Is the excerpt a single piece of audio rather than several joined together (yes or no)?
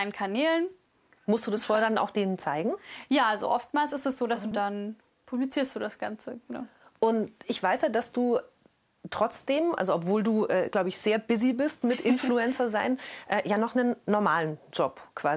no